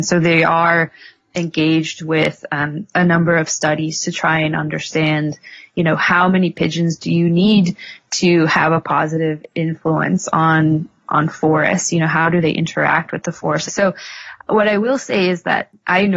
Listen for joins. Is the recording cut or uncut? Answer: cut